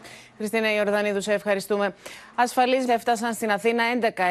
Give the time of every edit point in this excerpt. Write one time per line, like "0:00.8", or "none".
0:02.9